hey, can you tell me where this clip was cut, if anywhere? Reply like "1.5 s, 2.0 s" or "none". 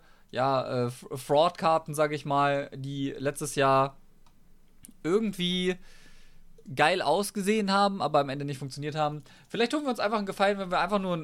none